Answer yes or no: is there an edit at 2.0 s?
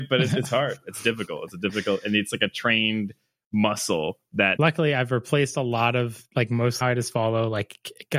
no